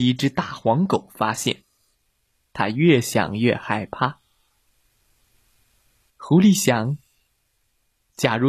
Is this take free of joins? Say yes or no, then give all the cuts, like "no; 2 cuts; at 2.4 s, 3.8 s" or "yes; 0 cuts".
no; 2 cuts; at 2.4 s, 6.1 s